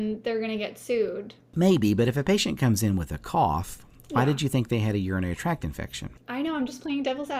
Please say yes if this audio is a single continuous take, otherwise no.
yes